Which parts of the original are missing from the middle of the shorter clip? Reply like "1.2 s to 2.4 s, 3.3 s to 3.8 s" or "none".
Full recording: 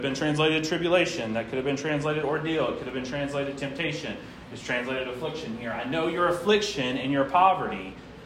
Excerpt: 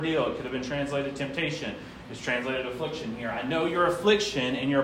none